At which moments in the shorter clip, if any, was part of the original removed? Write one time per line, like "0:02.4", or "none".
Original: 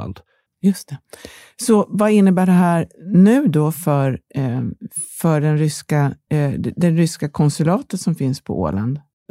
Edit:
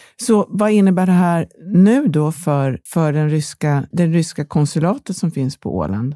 0:02.9
0:03.9